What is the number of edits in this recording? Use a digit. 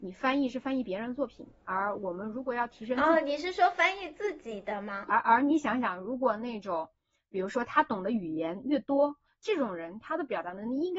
2